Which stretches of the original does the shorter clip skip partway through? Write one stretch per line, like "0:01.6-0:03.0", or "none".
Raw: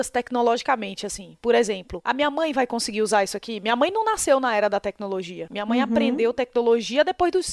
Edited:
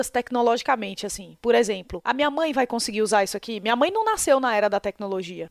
none